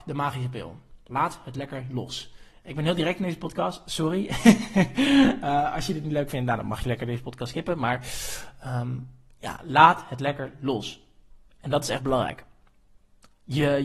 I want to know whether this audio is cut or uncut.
uncut